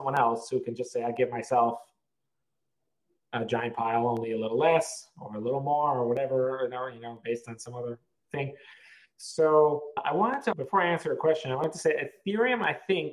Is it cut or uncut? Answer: cut